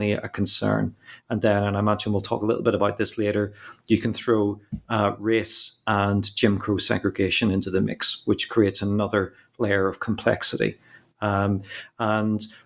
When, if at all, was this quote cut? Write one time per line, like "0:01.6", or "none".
none